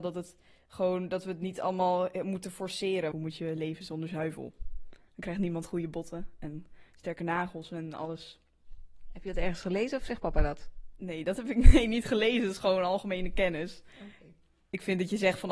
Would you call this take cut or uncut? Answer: cut